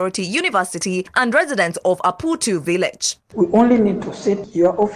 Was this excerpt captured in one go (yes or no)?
no